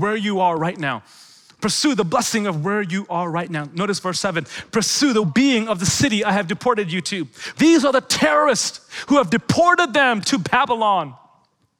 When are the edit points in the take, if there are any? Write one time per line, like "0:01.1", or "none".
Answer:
0:05.2
0:07.5